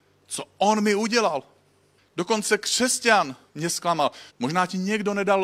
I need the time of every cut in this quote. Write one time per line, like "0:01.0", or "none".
0:02.0
0:04.3